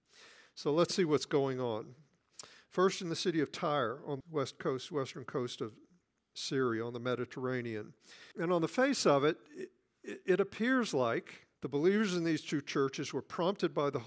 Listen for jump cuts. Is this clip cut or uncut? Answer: cut